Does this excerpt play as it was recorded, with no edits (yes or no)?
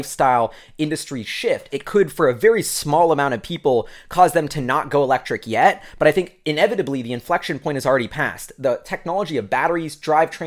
no